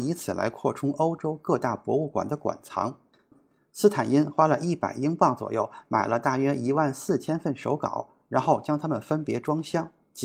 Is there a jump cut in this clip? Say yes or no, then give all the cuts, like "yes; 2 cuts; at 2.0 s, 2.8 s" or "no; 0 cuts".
no; 0 cuts